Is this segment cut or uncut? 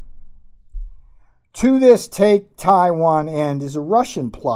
uncut